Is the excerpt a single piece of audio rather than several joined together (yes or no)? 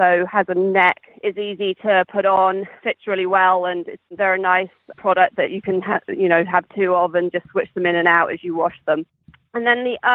no